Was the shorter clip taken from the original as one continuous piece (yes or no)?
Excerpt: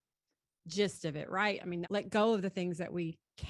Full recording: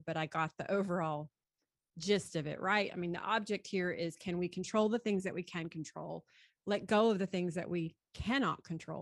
no